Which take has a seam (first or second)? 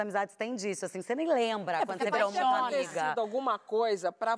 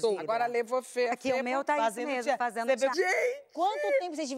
second